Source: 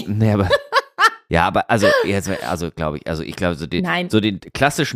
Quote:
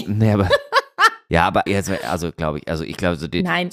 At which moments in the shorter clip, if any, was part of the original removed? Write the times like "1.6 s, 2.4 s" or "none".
1.7 s